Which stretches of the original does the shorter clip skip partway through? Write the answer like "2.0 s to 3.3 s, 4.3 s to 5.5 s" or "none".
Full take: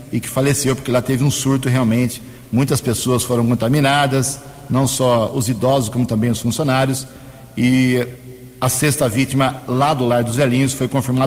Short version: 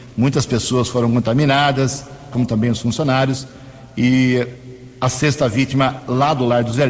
4.7 s to 5.9 s